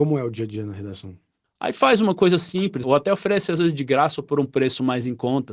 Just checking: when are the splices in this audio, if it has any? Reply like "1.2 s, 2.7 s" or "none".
1.4 s, 2.8 s